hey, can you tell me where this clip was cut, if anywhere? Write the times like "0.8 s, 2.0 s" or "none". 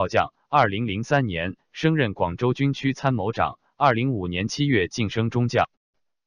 3.9 s